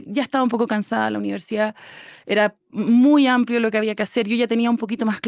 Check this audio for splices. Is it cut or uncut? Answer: uncut